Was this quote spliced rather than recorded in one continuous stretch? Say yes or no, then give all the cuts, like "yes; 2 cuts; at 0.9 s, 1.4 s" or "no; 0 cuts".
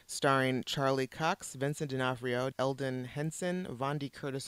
yes; 1 cut; at 2.5 s